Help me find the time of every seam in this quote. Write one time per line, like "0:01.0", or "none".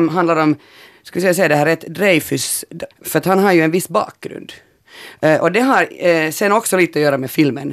0:02.9